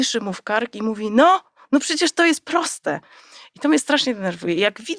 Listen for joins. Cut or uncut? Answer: cut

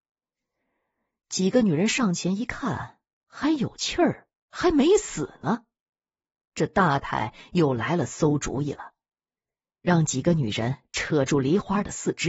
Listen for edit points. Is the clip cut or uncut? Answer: cut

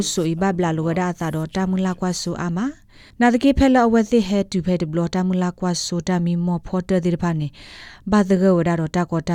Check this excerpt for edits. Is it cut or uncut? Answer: uncut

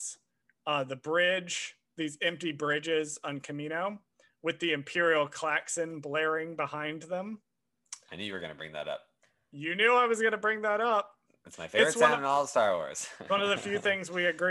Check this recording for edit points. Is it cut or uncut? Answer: uncut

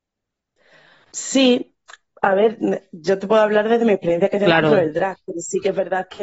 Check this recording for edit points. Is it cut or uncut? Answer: uncut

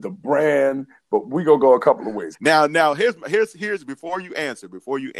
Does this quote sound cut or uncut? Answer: cut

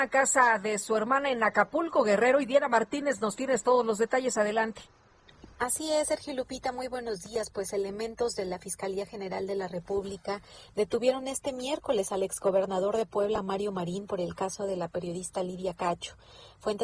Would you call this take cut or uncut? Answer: cut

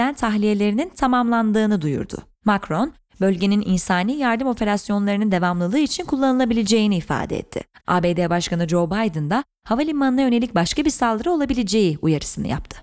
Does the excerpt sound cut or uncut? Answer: cut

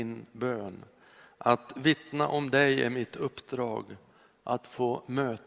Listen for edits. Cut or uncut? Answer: uncut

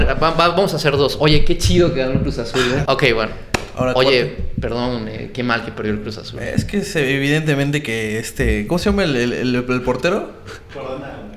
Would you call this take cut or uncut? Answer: cut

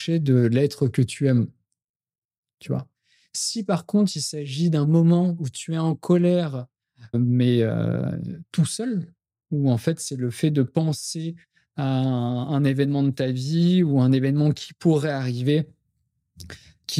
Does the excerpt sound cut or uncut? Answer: cut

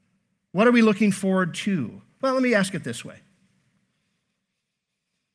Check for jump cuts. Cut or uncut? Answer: uncut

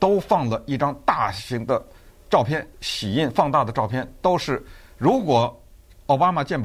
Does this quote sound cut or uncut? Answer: cut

